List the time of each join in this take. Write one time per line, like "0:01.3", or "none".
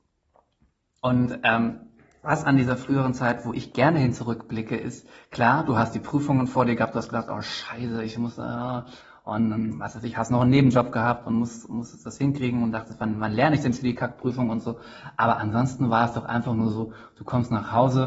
none